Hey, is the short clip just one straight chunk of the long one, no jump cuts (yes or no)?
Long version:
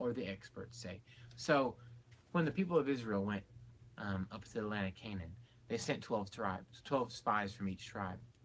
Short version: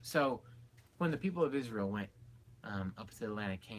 yes